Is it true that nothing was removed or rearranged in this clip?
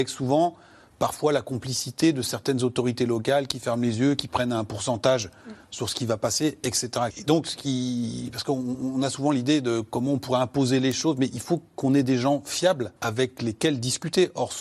no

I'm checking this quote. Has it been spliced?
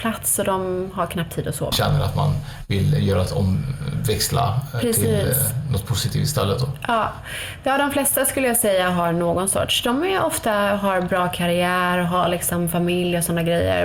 yes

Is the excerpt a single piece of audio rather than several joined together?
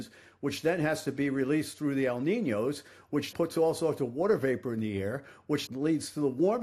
no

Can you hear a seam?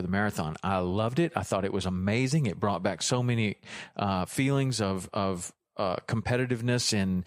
no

